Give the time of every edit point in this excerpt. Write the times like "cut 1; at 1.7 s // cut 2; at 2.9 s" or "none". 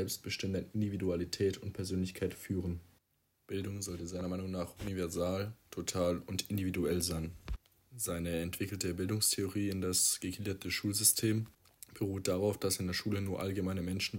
none